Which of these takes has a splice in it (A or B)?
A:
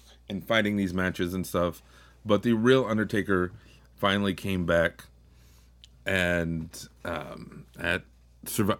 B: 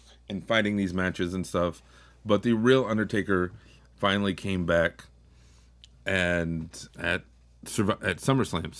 B